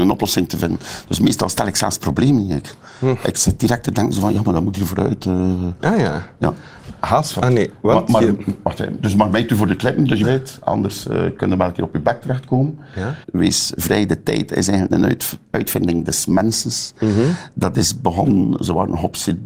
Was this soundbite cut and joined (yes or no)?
yes